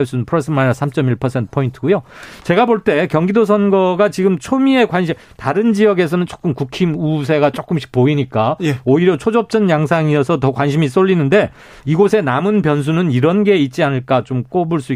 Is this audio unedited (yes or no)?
yes